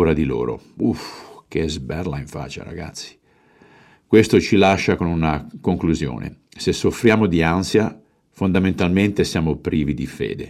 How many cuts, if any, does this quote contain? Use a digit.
0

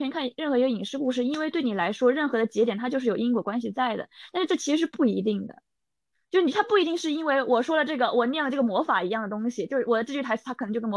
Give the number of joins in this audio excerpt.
0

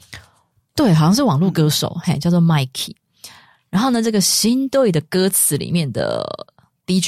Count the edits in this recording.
0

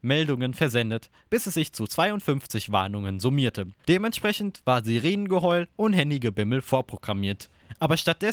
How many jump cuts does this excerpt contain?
1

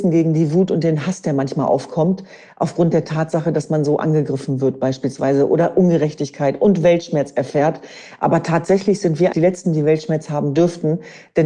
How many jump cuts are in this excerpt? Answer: 1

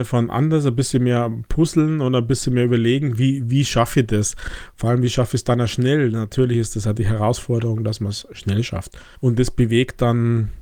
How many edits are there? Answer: 1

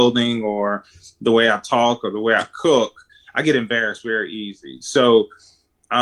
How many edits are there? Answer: 0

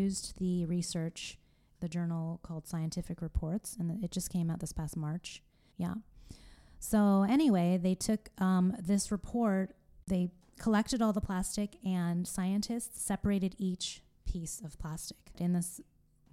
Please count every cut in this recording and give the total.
3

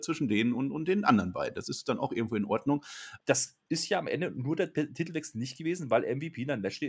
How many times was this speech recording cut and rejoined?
1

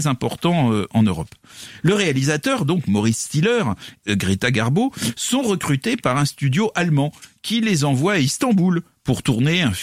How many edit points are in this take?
1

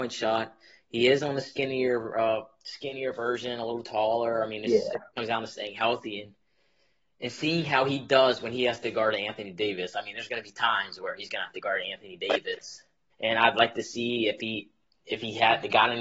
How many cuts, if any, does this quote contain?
1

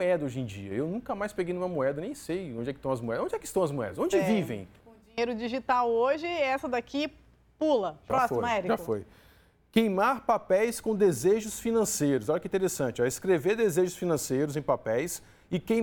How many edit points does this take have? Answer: 1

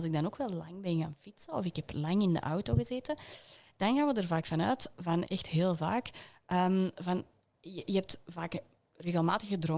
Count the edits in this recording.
1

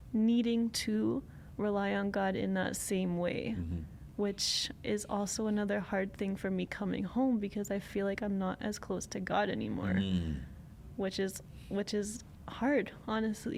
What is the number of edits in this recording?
0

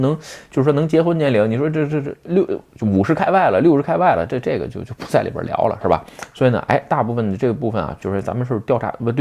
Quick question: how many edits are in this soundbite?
1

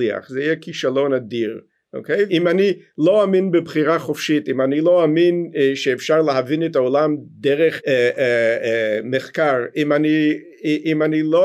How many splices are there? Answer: 2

